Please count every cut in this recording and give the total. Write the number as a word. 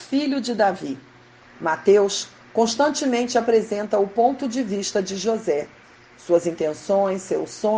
one